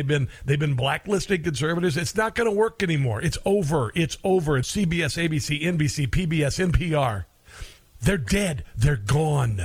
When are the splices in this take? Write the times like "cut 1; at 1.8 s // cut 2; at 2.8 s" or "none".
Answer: cut 1; at 4.6 s